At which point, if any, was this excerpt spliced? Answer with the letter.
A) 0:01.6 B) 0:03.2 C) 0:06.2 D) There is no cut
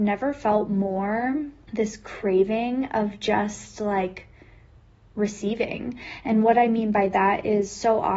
A